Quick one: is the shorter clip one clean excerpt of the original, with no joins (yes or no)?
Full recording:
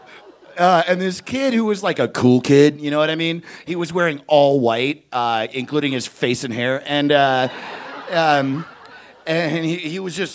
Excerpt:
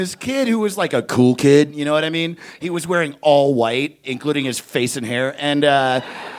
no